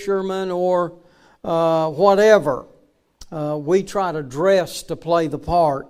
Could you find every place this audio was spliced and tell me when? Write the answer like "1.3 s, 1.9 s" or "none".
none